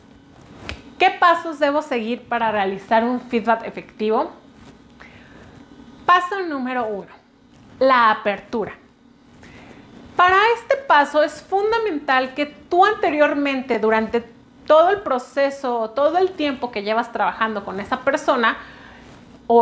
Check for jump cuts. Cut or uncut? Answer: uncut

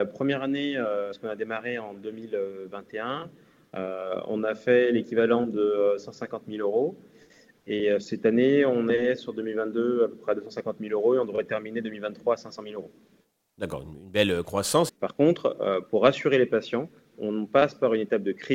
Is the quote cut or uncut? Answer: cut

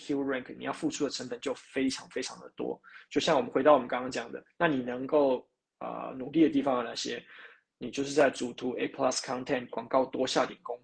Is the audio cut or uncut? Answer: cut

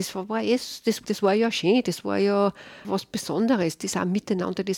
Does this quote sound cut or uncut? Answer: cut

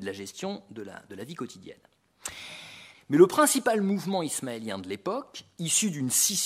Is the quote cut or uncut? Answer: cut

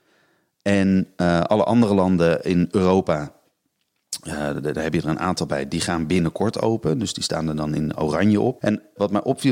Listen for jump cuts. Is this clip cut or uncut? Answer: cut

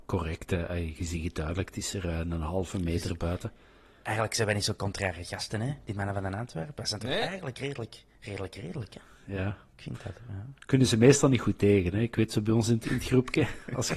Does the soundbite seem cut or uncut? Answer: uncut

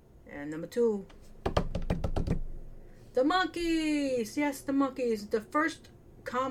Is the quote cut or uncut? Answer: uncut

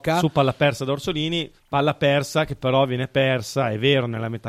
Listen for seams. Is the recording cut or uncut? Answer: cut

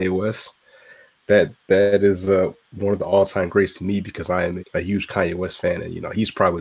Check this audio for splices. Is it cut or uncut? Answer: cut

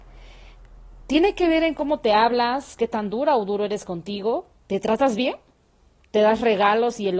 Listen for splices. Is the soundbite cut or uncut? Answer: uncut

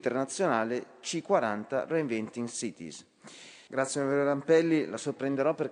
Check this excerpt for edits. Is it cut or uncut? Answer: cut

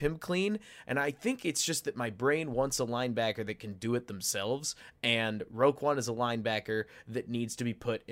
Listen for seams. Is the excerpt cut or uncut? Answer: uncut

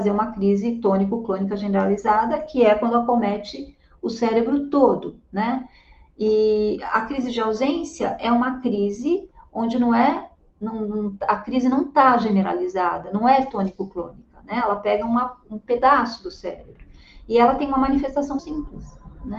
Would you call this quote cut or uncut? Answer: cut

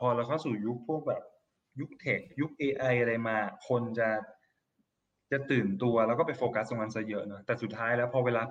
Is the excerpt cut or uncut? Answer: uncut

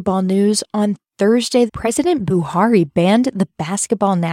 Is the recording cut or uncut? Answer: cut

